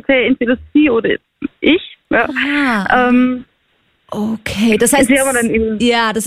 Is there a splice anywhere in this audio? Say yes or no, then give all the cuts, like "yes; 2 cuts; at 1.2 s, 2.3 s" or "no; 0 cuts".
no; 0 cuts